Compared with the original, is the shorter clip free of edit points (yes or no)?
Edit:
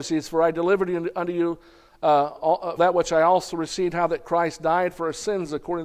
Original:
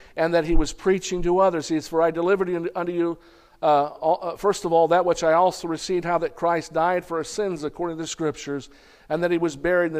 no